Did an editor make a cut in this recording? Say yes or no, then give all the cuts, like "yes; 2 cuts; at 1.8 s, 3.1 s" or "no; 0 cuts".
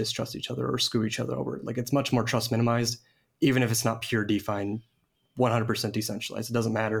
no; 0 cuts